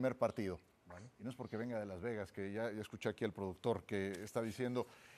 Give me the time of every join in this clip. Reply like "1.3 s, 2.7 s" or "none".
none

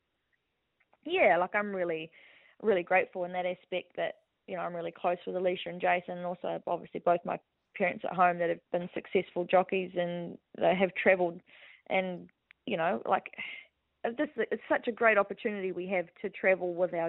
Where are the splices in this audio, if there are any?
8.7 s

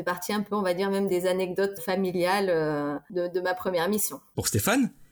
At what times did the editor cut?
1.8 s

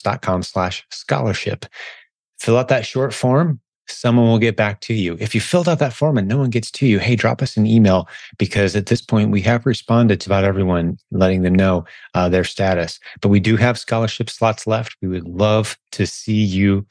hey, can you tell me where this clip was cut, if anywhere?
10.3 s

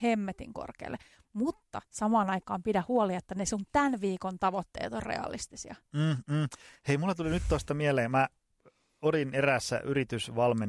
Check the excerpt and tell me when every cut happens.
none

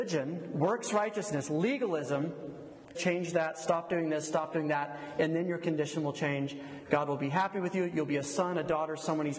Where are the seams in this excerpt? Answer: 2.9 s

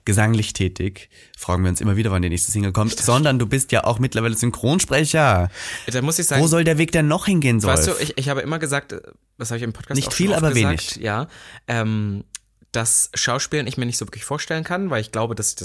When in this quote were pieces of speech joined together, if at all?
none

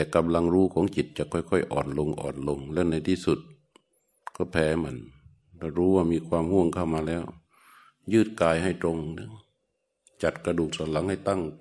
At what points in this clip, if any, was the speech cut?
none

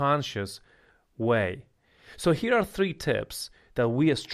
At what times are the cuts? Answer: none

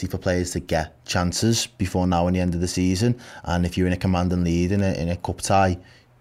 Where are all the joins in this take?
none

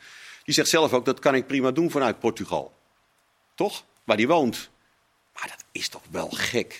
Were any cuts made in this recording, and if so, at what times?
none

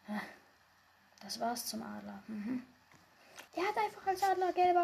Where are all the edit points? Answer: 3.5 s

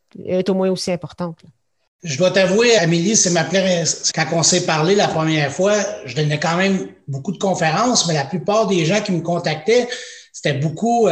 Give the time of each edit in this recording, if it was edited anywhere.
2.8 s, 4.1 s

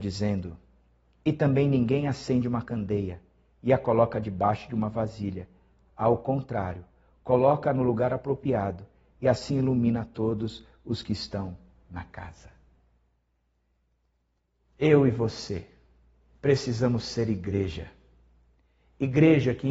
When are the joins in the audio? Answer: none

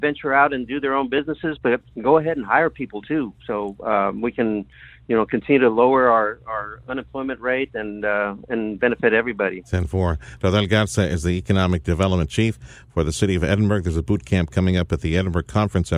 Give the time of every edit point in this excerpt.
none

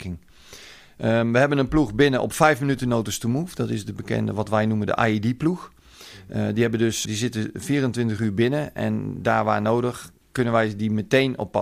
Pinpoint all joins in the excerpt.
7.1 s, 10.2 s

